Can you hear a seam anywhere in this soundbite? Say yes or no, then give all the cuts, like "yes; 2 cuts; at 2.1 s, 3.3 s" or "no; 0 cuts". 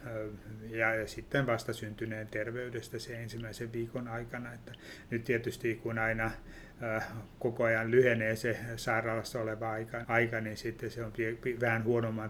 yes; 1 cut; at 10.0 s